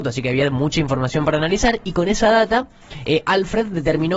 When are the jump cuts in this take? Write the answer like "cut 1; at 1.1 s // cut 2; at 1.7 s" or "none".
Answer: none